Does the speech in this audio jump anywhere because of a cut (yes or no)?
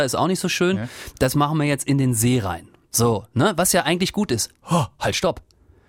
no